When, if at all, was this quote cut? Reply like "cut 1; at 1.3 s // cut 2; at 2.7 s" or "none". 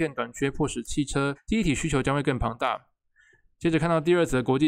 cut 1; at 1.4 s